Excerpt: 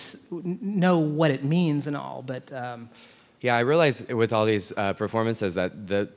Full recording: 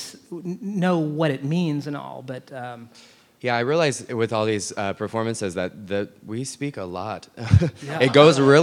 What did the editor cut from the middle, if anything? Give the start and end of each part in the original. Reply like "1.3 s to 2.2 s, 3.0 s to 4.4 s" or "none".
none